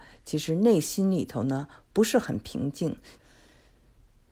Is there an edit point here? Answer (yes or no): yes